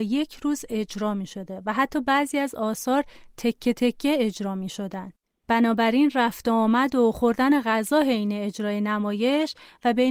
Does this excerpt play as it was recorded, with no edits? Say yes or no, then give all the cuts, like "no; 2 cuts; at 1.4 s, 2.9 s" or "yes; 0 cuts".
yes; 0 cuts